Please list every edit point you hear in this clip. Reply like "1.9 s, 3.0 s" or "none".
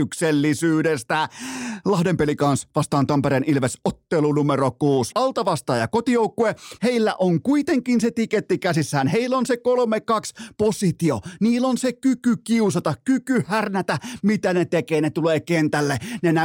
5.1 s, 6.8 s